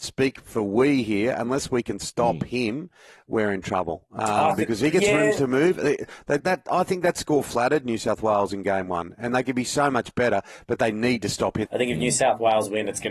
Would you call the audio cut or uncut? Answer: cut